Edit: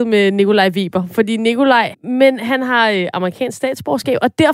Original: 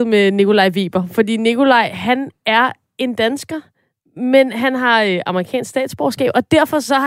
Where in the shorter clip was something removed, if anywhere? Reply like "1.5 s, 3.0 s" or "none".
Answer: 1.9 s

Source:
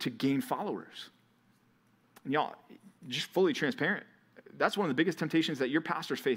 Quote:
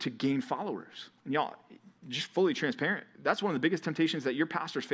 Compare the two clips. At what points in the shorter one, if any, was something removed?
1.2 s, 3.1 s

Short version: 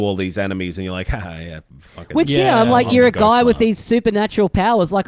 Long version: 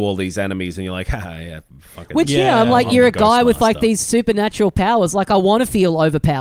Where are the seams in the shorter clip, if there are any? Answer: 3.6 s

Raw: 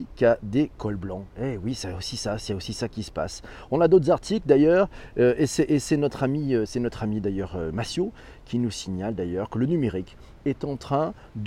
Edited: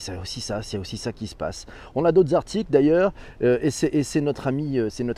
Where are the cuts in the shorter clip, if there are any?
none

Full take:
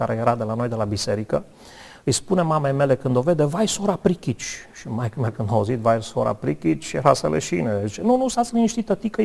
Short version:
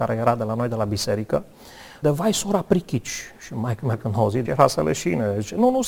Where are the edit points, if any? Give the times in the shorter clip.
2.0 s, 4.5 s

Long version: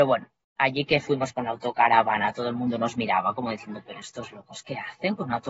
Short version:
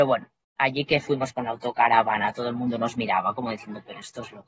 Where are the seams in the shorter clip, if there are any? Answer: none

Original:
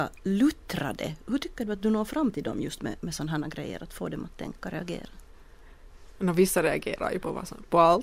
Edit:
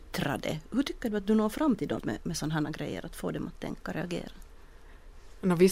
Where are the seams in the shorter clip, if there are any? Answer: 2.0 s

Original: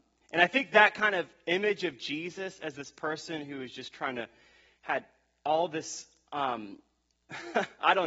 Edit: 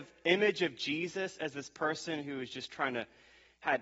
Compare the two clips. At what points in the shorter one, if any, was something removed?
none

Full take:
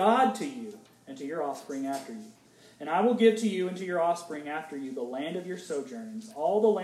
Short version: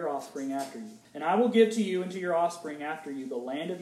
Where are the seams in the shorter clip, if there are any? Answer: 1.0 s

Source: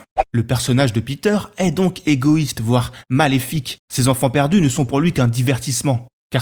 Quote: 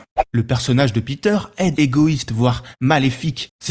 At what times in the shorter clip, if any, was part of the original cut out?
1.7 s

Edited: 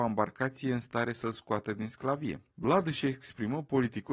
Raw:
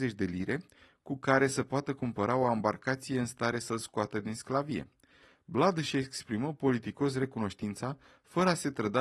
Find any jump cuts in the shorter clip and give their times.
2.5 s

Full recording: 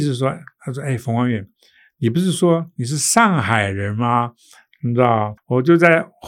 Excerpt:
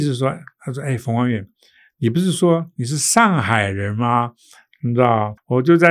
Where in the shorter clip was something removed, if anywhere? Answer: none

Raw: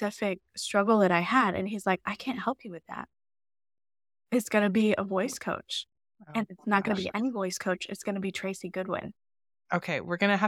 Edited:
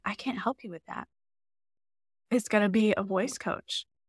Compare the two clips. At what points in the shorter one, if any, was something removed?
none

